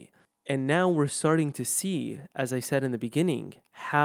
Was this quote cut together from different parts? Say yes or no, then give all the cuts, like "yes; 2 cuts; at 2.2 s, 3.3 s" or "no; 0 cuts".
no; 0 cuts